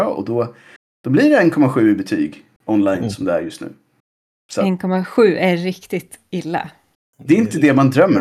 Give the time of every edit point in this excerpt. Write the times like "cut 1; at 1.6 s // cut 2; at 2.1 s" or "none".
none